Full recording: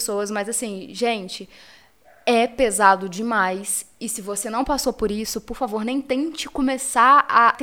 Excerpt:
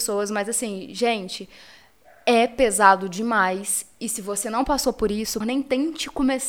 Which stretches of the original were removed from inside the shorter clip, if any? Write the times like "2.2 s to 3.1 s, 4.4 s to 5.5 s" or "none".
5.4 s to 5.8 s